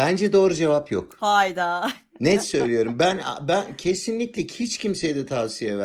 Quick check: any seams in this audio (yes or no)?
no